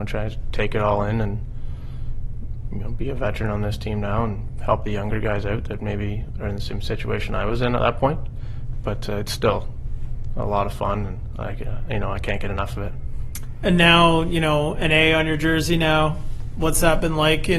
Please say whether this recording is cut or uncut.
uncut